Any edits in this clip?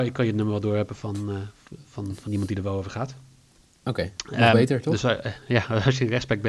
no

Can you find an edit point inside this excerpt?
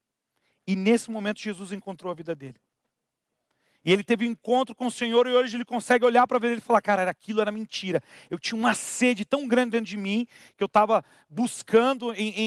no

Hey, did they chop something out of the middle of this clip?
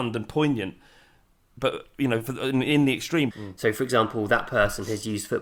yes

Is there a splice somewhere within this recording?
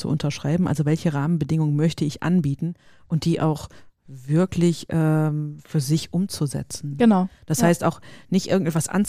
no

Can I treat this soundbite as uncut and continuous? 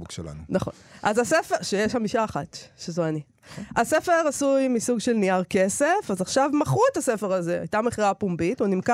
yes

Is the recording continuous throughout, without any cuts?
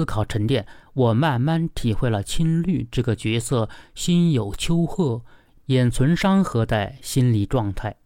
yes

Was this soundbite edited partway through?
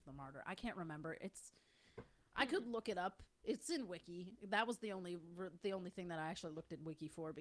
no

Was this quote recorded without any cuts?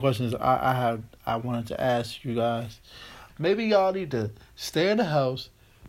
no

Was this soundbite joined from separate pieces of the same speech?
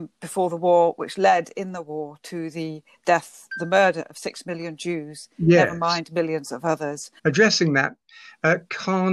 yes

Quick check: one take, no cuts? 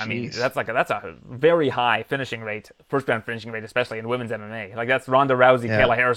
yes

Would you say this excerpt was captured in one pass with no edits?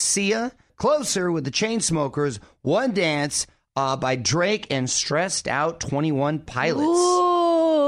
yes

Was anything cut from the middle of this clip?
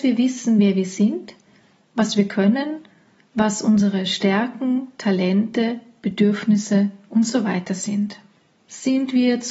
no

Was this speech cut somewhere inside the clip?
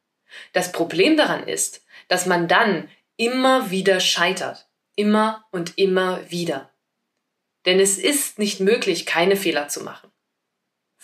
no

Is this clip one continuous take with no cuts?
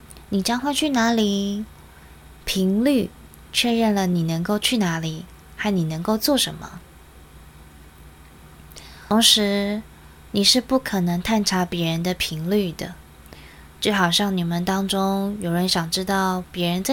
no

